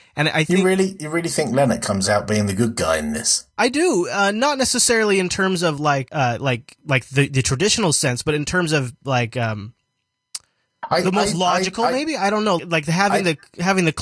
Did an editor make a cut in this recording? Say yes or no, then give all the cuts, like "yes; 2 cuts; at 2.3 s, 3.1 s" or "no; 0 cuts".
yes; 2 cuts; at 6.1 s, 12.6 s